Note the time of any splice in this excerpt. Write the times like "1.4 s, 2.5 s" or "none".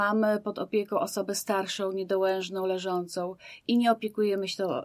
none